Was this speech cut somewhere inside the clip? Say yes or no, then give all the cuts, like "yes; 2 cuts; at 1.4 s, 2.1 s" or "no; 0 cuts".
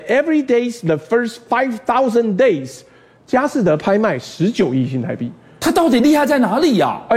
no; 0 cuts